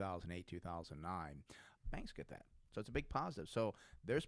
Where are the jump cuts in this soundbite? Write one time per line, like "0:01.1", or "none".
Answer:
0:01.8